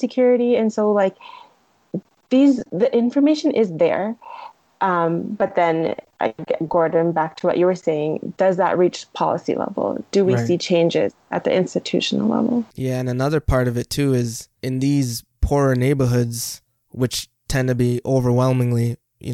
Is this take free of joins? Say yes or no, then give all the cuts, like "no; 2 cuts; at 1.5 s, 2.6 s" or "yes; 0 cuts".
yes; 0 cuts